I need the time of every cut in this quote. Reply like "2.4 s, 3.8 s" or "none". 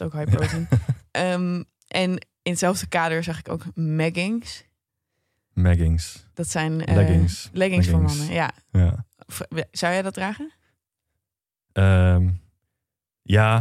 none